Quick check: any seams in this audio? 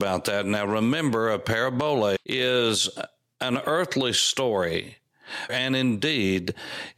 yes; 2 cuts; at 2.2 s, 5.5 s

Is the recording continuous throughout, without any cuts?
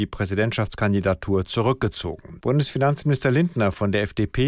no; 1 cut; at 2.4 s

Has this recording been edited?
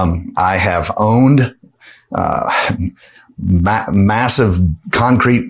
no; 0 cuts

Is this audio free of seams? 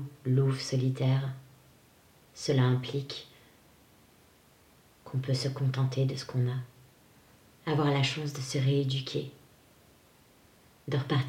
yes; 0 cuts

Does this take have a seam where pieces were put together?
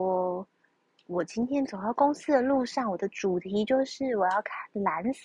no; 0 cuts

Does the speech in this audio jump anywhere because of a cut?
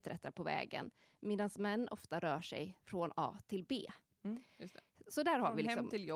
no; 0 cuts

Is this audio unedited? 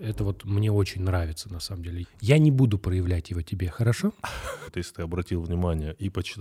no; 2 cuts; at 2.0 s, 4.7 s

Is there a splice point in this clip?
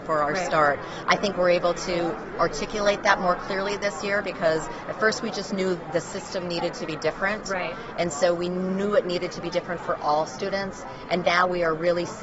no; 0 cuts

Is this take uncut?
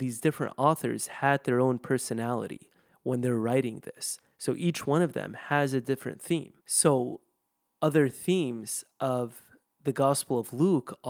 no; 1 cut; at 6.6 s

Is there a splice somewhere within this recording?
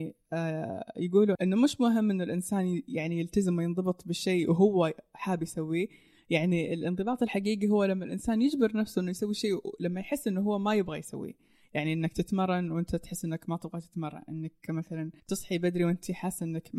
yes; 2 cuts; at 1.4 s, 15.2 s

